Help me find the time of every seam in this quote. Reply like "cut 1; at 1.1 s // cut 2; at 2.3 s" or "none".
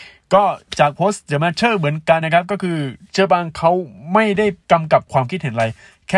cut 1; at 2.2 s // cut 2; at 4.6 s